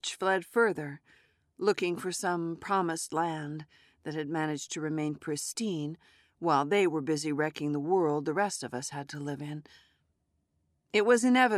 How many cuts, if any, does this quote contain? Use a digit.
0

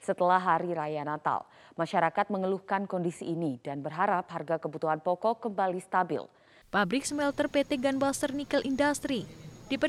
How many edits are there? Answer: 1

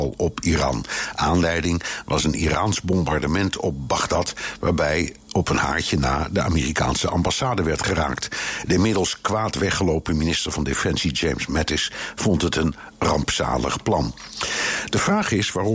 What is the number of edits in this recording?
0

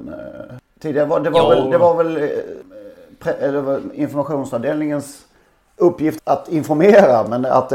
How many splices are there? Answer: 1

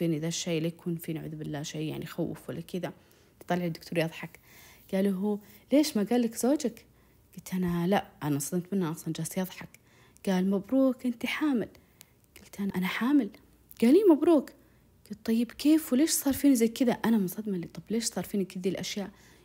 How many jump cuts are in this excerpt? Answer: 1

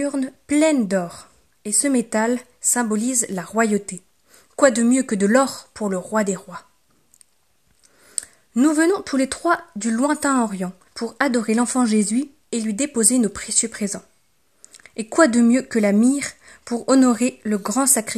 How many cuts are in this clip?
2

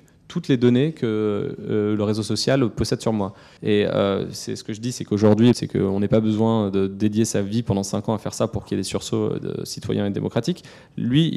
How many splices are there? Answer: 2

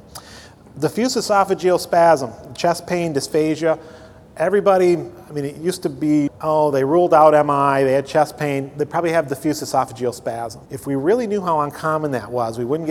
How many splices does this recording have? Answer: 2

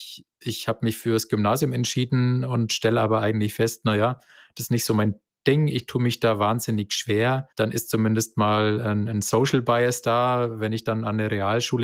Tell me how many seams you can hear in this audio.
1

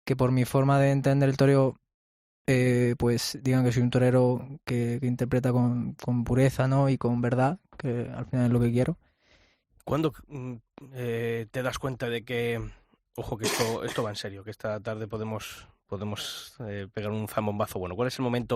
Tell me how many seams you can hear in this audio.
1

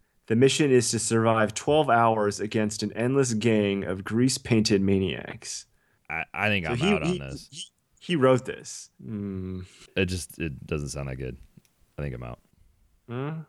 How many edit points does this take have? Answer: 2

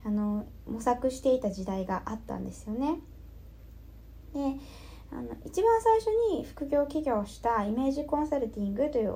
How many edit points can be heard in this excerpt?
0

